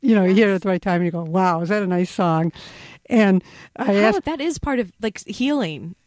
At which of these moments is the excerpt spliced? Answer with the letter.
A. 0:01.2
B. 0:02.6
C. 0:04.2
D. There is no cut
C